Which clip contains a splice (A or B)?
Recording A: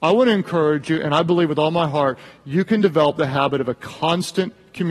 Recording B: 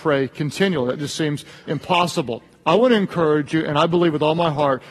B